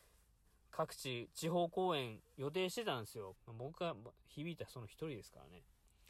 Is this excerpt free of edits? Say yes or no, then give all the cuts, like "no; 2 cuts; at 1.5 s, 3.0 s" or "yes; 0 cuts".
no; 1 cut; at 3.3 s